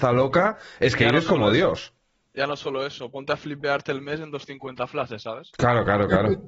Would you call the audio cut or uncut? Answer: uncut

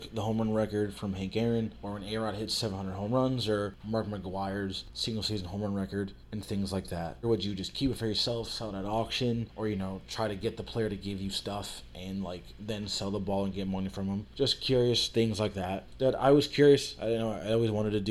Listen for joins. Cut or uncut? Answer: cut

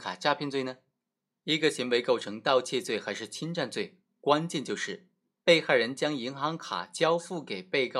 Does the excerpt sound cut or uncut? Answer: cut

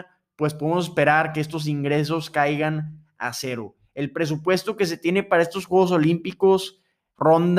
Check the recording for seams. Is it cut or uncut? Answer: uncut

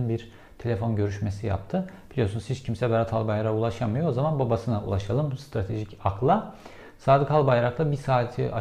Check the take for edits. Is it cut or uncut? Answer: uncut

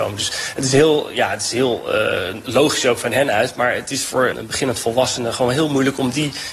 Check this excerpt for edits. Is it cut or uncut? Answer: uncut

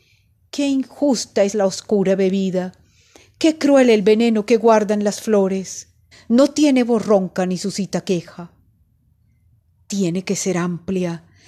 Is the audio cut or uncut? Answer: cut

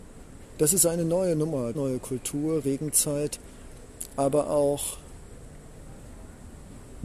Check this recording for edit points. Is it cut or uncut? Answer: cut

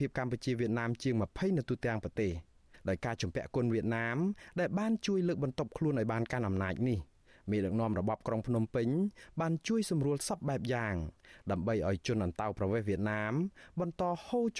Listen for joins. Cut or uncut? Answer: uncut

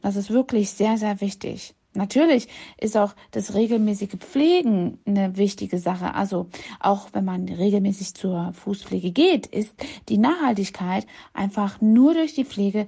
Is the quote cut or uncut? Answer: uncut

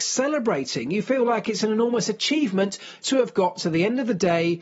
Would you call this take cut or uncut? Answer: cut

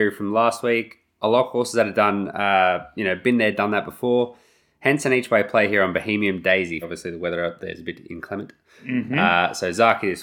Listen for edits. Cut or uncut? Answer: cut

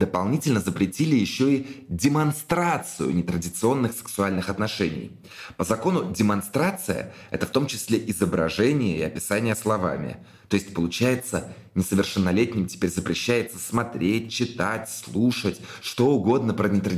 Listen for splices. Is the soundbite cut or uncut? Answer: uncut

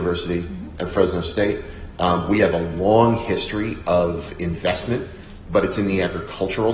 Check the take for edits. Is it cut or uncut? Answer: uncut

